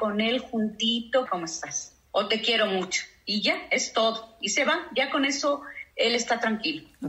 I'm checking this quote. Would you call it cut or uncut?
cut